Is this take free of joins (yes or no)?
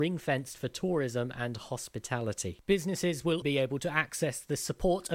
no